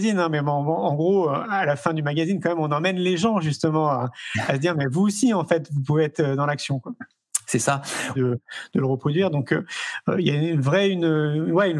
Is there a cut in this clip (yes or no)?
yes